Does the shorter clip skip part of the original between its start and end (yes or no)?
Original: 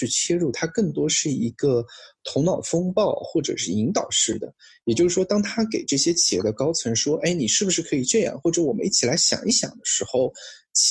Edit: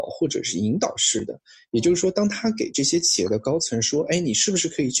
no